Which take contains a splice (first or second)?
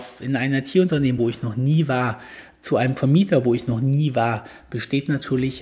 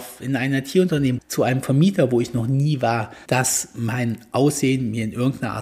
second